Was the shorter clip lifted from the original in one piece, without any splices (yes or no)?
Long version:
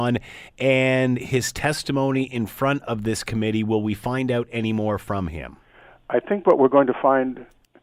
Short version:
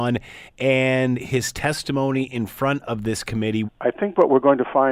no